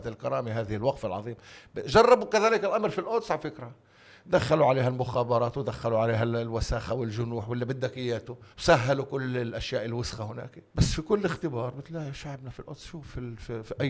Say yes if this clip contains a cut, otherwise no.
yes